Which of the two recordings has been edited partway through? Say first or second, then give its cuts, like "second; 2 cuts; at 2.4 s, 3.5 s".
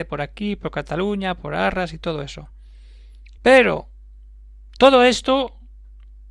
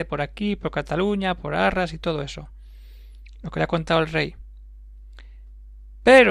first; 1 cut; at 3.4 s